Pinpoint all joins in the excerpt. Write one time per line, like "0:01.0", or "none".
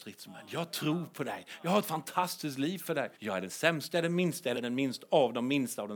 0:03.1
0:04.5